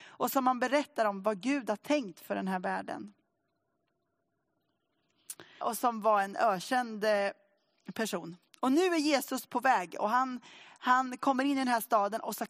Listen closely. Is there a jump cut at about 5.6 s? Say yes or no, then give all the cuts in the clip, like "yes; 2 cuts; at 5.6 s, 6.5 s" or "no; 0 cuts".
yes; 1 cut; at 5.6 s